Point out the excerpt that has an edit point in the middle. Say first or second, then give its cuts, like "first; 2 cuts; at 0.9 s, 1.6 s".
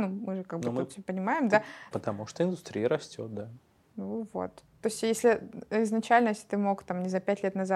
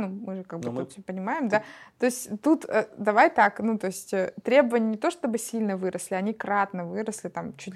first; 1 cut; at 1.9 s